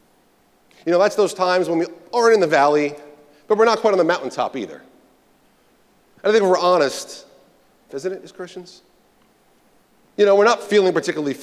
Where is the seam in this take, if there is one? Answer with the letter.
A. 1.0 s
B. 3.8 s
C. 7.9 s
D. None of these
C